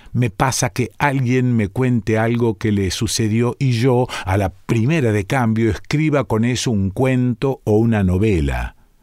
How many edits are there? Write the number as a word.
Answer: zero